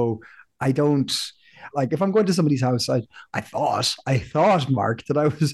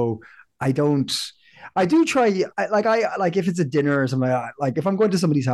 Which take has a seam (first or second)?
first